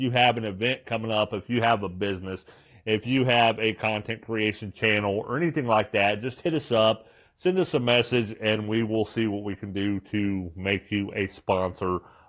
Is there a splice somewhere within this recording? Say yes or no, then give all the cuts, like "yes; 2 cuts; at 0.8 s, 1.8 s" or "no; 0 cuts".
no; 0 cuts